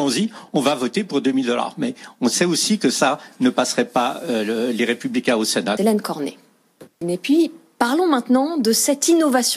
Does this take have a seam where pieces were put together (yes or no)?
yes